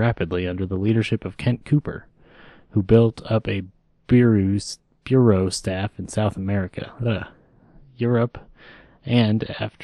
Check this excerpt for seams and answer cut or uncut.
uncut